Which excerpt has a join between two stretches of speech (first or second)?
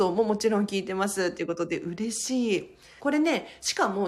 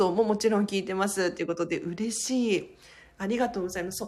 first